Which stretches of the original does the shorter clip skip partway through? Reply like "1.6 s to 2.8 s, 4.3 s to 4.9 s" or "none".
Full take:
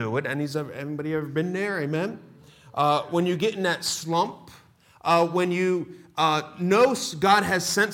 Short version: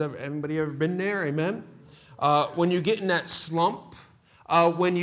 none